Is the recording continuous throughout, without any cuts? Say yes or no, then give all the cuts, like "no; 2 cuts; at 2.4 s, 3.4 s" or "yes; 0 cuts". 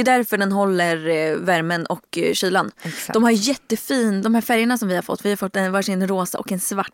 yes; 0 cuts